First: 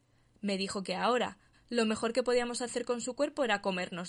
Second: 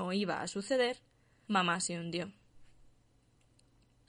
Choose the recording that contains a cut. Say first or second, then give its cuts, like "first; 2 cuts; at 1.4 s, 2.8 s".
first; 1 cut; at 1.5 s